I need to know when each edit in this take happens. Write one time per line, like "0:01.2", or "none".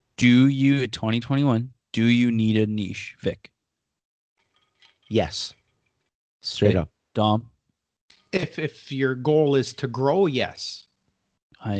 none